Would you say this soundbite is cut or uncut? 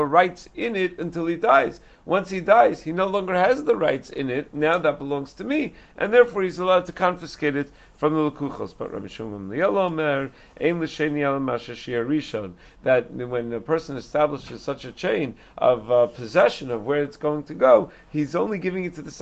uncut